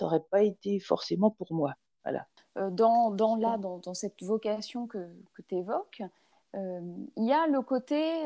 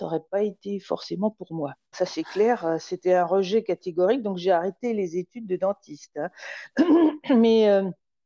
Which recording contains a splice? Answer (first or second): second